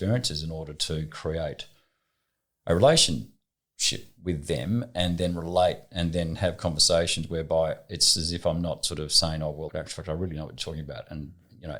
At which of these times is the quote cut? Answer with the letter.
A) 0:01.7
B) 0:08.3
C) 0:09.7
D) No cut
C